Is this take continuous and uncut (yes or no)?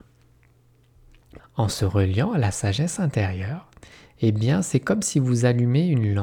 no